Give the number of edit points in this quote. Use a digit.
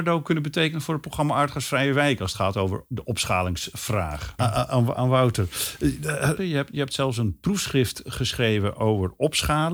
2